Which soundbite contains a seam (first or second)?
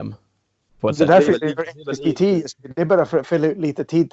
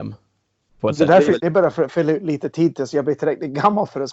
second